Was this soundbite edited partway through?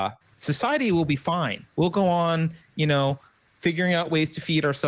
yes; 1 cut; at 1.7 s

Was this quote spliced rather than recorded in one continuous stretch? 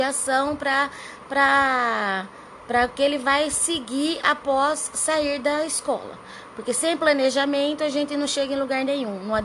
no; 0 cuts

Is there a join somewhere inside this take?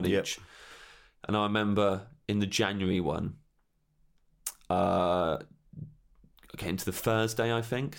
no; 0 cuts

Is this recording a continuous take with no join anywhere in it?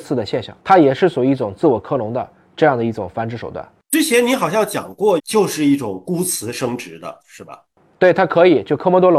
no; 1 cut; at 5.2 s

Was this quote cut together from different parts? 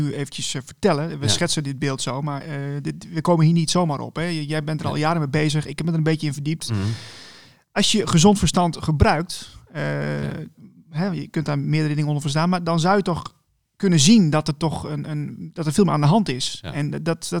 no; 0 cuts

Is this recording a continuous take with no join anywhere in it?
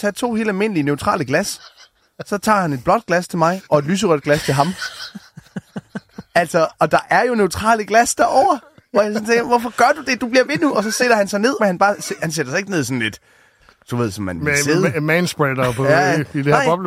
no; 1 cut; at 11.6 s

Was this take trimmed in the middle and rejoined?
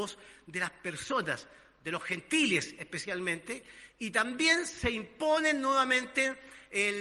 no; 0 cuts

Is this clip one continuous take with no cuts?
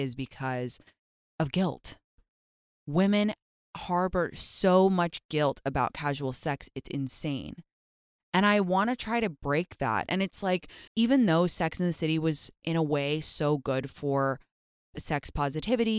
no; 1 cut; at 10.9 s

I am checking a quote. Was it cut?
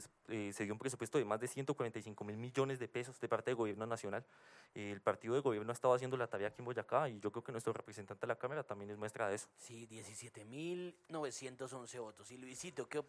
no; 0 cuts

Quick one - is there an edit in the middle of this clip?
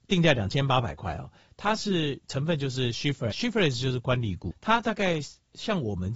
yes; 2 cuts; at 3.3 s, 4.5 s

